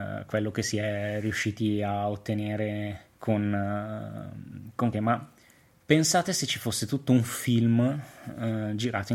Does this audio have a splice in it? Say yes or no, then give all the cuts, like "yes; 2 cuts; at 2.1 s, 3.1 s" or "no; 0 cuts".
yes; 2 cuts; at 3.1 s, 4.9 s